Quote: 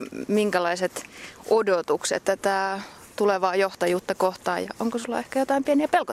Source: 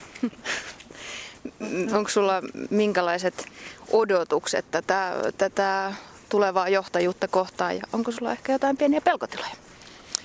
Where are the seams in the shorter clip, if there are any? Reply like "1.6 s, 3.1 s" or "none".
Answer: 2.2 s